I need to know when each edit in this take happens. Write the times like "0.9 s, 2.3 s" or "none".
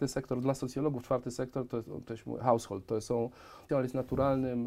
3.7 s